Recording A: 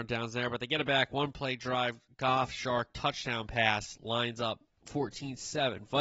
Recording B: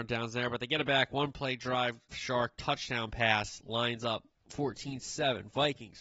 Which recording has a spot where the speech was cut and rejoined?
B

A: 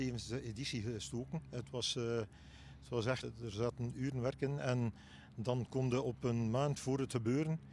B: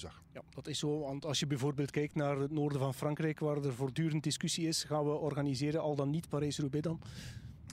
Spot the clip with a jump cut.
A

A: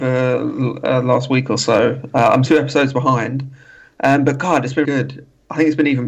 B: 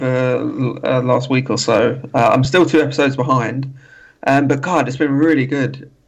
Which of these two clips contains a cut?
A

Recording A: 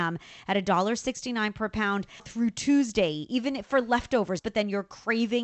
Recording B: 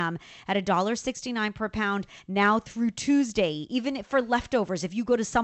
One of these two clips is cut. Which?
A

